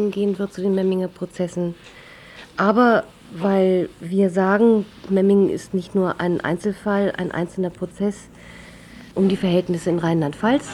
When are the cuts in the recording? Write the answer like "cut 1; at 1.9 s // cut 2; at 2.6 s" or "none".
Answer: cut 1; at 5.1 s // cut 2; at 9.1 s